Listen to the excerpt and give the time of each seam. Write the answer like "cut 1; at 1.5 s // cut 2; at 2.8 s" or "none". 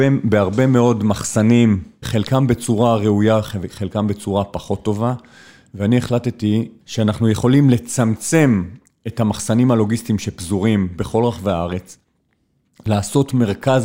cut 1; at 2.0 s // cut 2; at 6.8 s